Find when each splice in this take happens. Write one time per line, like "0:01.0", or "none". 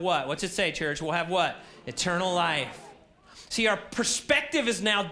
none